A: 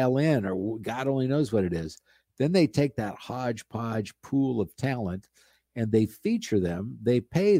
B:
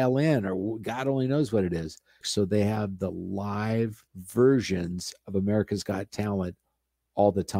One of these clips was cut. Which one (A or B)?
B